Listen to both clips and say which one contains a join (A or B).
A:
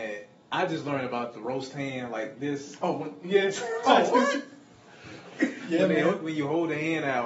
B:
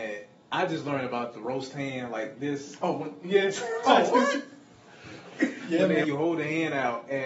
B